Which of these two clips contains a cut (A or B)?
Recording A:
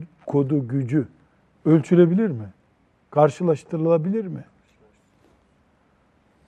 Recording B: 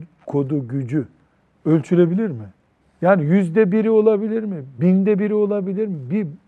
B